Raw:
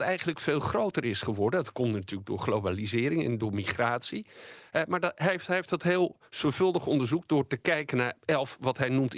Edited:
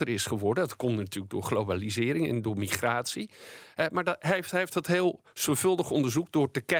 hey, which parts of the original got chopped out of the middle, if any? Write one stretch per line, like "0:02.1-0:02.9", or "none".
none